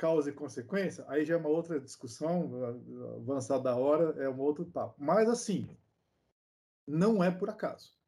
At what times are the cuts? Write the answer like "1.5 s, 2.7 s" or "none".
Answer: none